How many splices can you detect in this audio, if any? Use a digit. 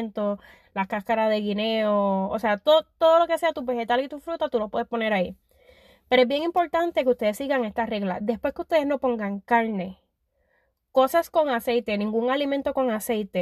0